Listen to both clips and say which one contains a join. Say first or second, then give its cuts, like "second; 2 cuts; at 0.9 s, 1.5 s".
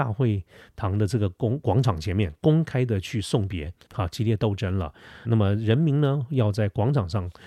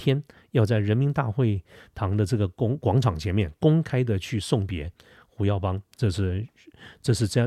first; 2 cuts; at 3.9 s, 5.2 s